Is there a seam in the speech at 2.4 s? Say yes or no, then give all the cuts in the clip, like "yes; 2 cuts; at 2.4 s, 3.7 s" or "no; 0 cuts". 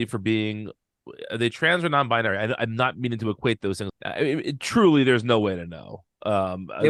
no; 1 cut; at 3.9 s